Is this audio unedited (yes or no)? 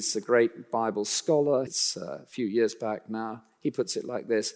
no